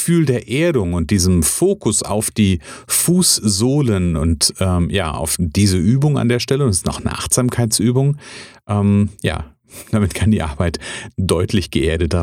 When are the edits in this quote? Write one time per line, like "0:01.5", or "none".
none